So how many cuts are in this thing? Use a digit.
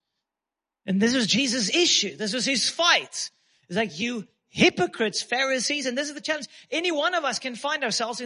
0